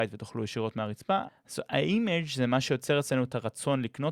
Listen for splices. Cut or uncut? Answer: cut